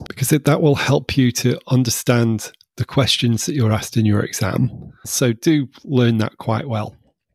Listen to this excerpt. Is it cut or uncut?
cut